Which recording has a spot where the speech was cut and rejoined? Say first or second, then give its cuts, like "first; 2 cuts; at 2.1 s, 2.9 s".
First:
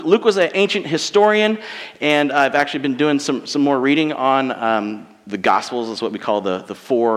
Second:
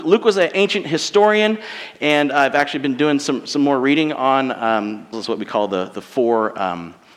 second; 1 cut; at 5.1 s